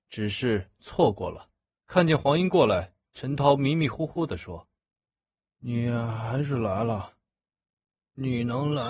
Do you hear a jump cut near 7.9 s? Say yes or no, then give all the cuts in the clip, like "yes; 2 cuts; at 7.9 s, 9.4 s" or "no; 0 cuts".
no; 2 cuts; at 1.8 s, 4.8 s